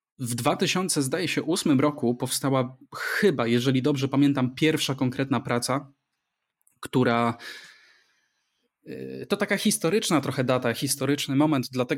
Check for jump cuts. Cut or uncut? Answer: uncut